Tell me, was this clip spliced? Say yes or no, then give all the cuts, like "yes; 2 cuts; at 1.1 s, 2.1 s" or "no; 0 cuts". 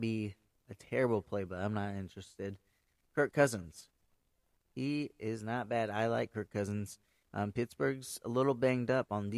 no; 0 cuts